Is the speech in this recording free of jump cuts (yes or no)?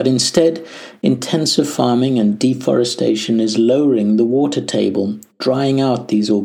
yes